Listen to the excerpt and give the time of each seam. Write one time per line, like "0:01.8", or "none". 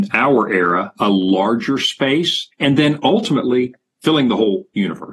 0:02.5